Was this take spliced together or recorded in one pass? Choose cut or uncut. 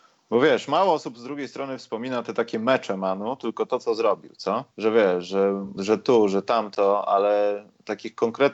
cut